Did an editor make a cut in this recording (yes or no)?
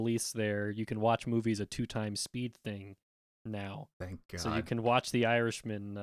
no